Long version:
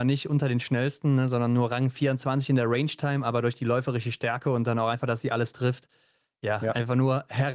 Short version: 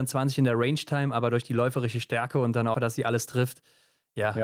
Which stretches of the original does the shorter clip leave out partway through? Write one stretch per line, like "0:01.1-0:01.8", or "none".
0:04.9-0:05.0